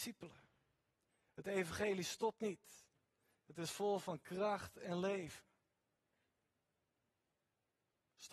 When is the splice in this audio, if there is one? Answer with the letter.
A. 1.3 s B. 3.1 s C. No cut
C